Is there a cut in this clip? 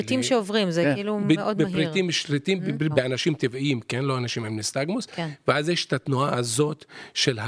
yes; 1 cut; at 2.9 s

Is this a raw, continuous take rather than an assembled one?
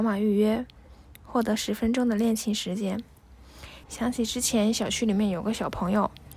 no; 1 cut; at 3.8 s

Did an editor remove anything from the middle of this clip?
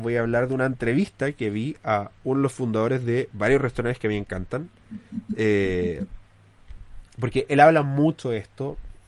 no; 0 cuts

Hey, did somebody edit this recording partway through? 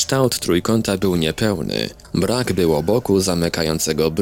no; 0 cuts

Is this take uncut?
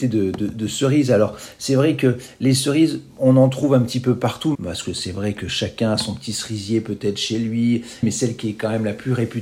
no; 2 cuts; at 4.5 s, 8.0 s

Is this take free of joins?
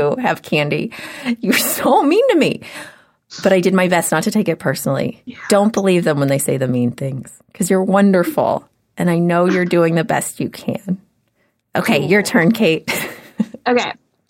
yes; 0 cuts

